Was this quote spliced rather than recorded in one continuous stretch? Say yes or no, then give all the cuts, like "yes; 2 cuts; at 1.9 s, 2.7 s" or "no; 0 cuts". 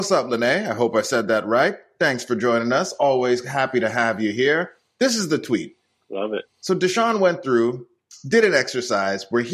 no; 0 cuts